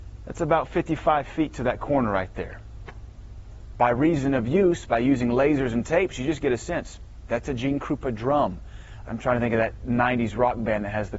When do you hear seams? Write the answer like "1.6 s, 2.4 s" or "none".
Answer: 7.3 s, 9.1 s